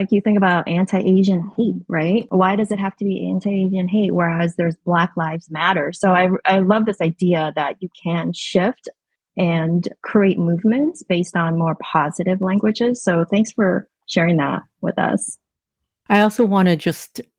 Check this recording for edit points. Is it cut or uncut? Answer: uncut